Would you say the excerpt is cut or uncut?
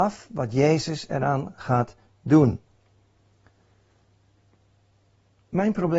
uncut